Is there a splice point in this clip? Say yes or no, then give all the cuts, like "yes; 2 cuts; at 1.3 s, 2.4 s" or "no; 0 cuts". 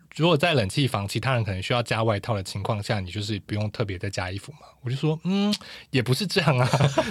no; 0 cuts